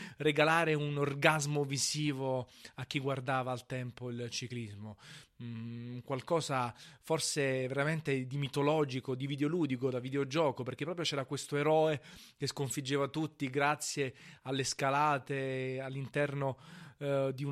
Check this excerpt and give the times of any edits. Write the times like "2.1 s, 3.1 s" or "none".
none